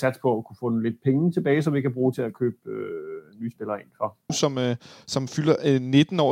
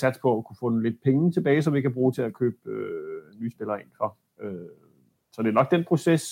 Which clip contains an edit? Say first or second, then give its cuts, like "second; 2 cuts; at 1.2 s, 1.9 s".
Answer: first; 1 cut; at 4.3 s